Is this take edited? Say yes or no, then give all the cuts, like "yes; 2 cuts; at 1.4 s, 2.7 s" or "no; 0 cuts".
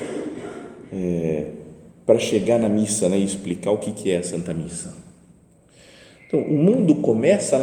no; 0 cuts